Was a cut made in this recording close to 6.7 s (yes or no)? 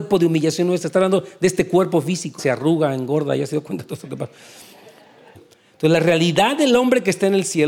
no